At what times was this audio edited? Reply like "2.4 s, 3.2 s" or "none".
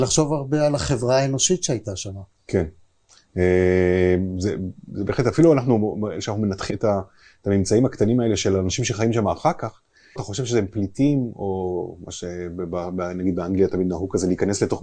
6.7 s, 10.2 s